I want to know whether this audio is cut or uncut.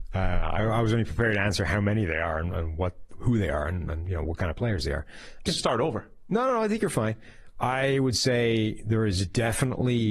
cut